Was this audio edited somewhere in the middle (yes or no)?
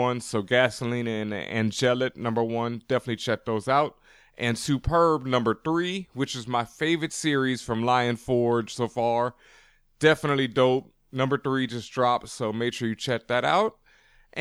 no